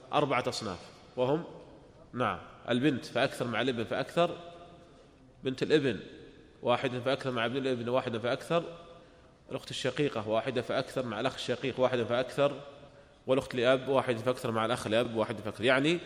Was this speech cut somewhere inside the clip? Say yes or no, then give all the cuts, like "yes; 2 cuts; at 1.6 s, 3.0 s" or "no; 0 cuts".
no; 0 cuts